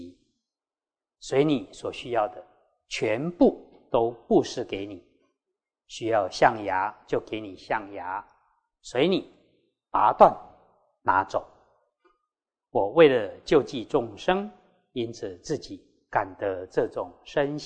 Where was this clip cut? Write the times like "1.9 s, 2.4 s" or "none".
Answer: none